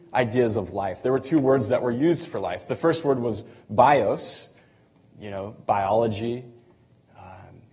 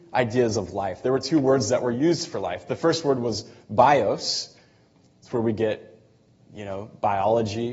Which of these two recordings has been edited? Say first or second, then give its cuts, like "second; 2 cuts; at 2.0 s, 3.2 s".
first; 1 cut; at 5.1 s